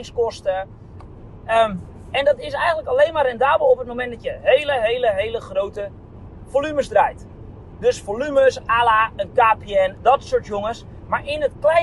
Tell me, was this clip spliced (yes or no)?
yes